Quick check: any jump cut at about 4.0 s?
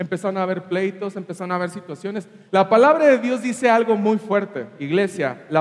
no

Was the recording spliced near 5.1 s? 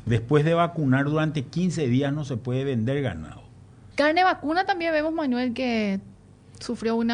no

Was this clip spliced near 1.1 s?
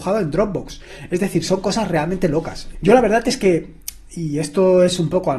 no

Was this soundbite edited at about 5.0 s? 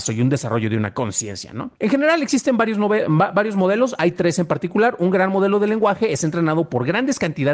no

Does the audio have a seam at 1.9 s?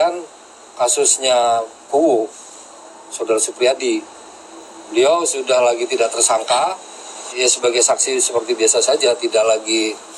yes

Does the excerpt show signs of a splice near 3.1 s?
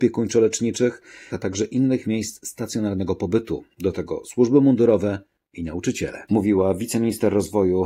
no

